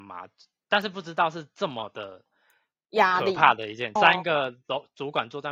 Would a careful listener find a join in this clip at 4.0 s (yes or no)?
yes